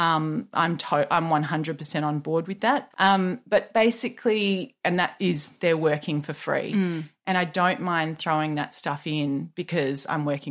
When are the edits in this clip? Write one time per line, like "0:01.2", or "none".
0:02.9
0:04.8